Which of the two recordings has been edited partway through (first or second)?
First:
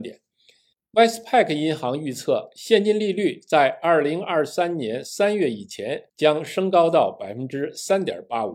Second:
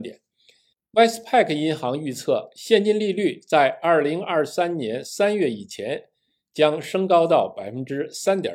first